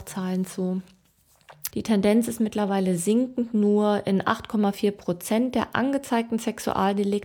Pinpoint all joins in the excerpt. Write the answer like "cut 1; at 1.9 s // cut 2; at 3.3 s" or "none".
cut 1; at 1.7 s